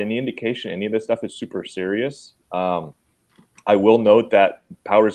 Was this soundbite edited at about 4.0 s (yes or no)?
no